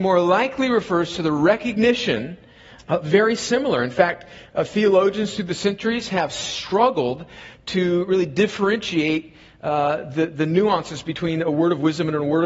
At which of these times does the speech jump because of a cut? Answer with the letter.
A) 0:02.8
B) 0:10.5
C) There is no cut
A